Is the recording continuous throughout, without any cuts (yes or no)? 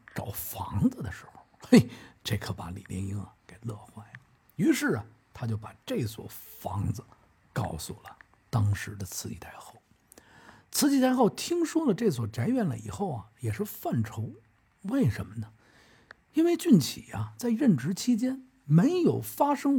yes